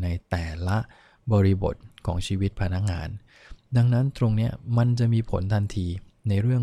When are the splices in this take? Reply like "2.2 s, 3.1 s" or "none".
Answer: none